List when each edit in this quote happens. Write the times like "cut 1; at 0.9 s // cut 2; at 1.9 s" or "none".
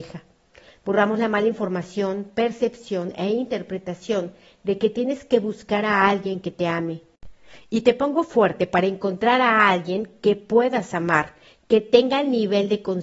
none

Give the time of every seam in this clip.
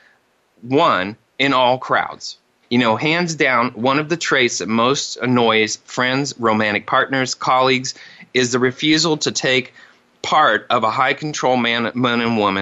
cut 1; at 2.6 s

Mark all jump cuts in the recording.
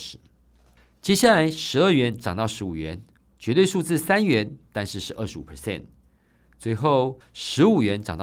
none

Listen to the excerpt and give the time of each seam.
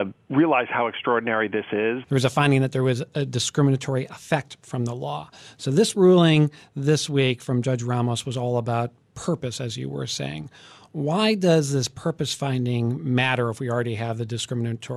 cut 1; at 2.0 s

